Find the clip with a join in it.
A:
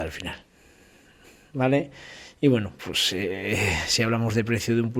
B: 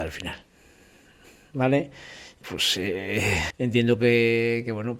B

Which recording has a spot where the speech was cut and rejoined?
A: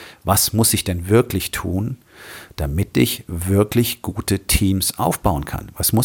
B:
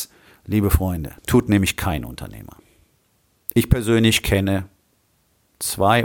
B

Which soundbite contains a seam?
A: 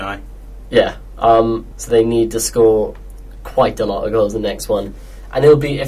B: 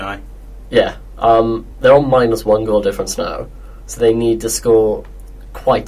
A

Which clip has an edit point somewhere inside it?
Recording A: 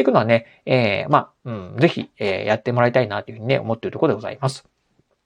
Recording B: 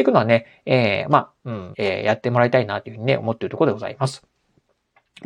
B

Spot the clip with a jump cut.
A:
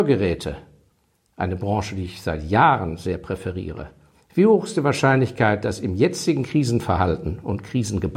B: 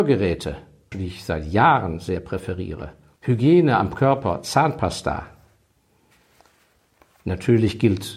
B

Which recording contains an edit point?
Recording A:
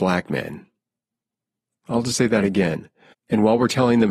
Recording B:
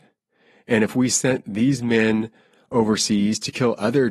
A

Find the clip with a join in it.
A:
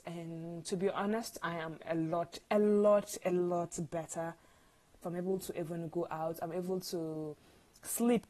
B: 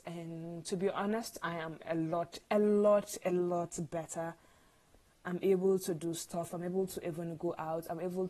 A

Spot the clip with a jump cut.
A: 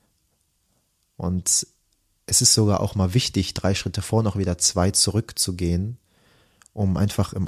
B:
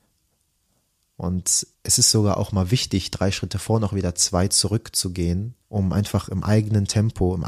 B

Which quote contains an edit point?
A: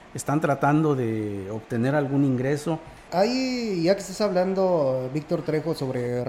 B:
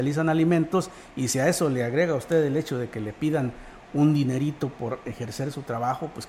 A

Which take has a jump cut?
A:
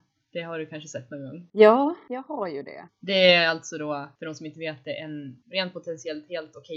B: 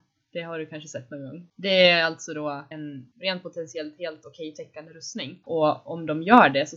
B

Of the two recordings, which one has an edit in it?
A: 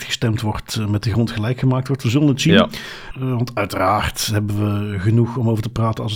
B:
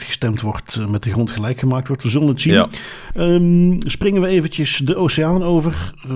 A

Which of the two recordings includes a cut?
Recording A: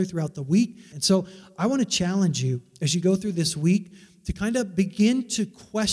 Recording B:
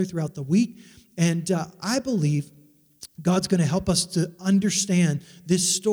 A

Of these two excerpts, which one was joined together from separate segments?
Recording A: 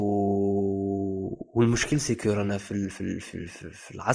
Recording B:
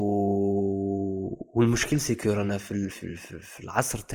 B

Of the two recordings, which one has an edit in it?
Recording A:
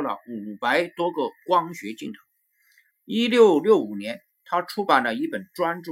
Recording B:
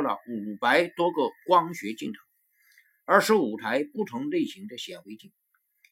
A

